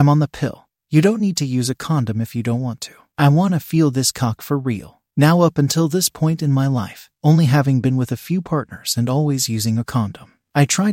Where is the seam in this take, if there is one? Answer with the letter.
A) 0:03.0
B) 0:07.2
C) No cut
B